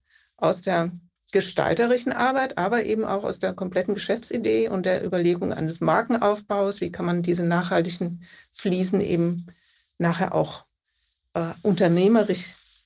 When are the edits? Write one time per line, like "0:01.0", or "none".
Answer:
none

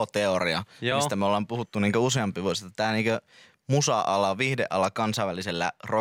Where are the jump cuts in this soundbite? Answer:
none

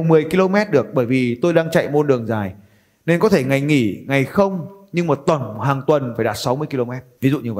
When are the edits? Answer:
none

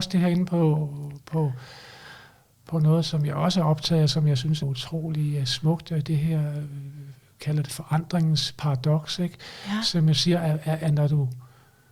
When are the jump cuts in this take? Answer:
0:04.6
0:10.8

